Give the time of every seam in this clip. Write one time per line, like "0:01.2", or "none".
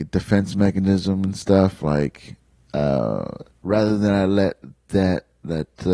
none